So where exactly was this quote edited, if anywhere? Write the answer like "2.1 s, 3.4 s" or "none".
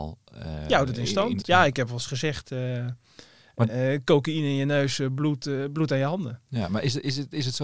1.4 s